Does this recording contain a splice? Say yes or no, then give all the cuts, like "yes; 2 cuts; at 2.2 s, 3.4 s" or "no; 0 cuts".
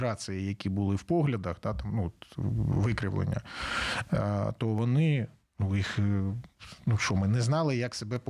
no; 0 cuts